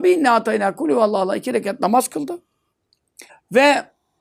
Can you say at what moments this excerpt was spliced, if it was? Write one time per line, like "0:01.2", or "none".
0:03.3